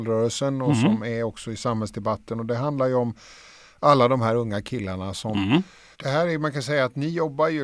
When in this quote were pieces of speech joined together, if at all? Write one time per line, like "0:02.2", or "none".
0:05.9